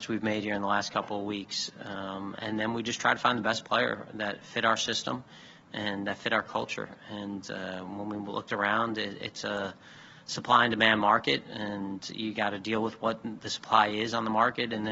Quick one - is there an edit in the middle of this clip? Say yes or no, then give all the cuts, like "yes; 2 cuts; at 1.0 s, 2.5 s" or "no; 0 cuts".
no; 0 cuts